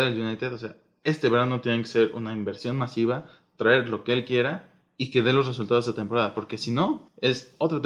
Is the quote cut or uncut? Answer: uncut